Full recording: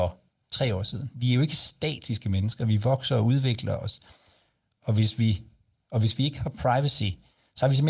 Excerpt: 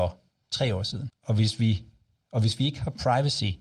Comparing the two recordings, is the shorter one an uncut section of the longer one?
no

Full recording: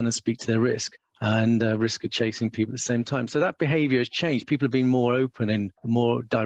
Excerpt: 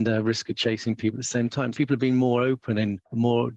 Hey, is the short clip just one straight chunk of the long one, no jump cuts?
no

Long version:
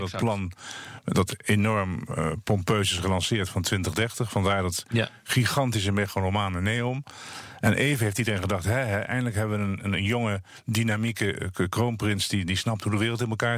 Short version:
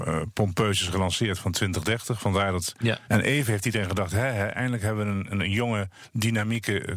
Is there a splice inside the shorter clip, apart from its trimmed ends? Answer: yes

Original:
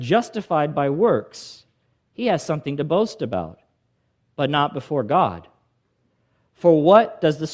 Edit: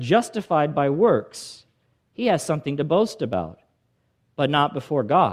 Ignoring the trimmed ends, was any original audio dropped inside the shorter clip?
no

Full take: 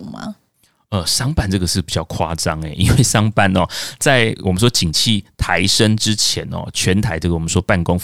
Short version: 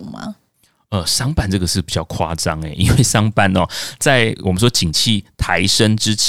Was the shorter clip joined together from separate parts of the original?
no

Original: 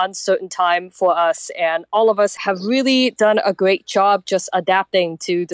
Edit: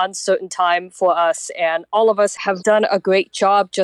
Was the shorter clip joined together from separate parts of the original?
yes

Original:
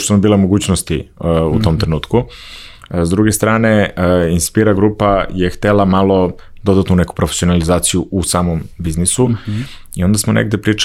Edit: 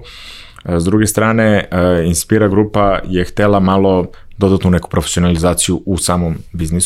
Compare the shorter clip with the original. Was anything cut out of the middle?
no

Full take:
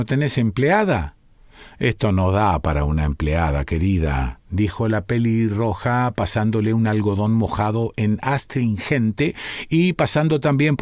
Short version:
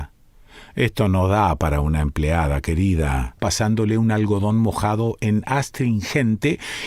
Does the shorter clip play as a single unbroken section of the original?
no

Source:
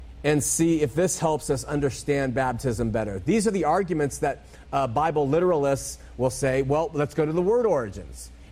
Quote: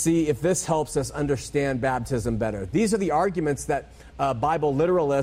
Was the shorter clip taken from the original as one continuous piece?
yes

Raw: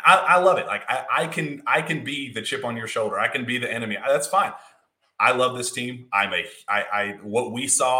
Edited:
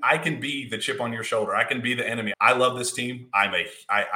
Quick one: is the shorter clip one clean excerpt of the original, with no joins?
no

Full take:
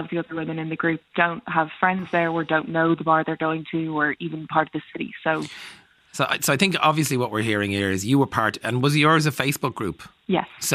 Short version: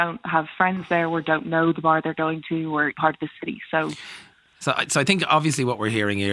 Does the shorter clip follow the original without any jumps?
no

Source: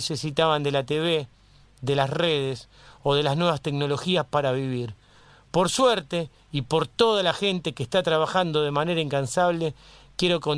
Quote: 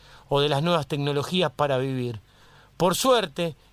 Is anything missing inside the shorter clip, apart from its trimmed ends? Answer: no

